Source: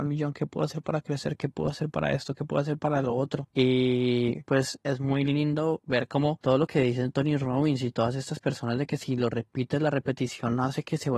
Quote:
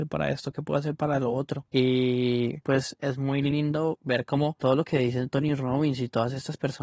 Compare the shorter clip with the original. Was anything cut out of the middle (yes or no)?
no